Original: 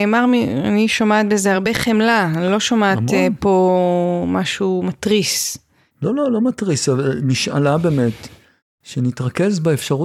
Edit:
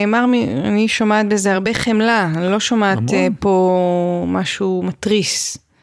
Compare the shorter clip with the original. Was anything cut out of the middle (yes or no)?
no